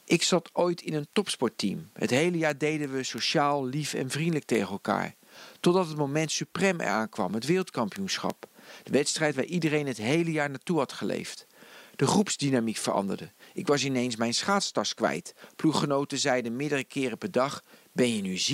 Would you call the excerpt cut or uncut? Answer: uncut